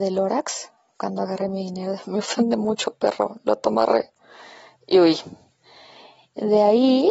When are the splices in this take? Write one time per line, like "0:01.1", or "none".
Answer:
none